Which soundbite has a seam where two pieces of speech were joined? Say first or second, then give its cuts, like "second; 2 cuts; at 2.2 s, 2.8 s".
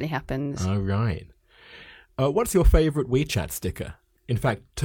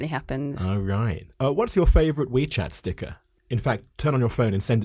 second; 1 cut; at 1.3 s